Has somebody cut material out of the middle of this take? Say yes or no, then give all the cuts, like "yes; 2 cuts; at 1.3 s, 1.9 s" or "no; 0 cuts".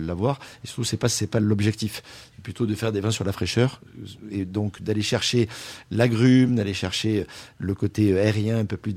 no; 0 cuts